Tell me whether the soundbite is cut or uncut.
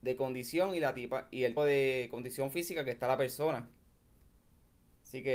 cut